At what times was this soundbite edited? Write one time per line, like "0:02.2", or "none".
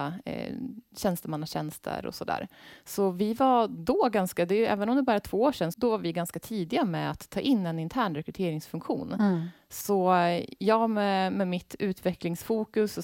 0:05.7